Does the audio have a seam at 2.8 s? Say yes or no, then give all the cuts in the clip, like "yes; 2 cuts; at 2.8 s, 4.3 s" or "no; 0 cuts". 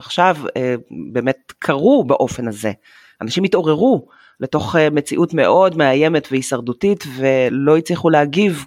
no; 0 cuts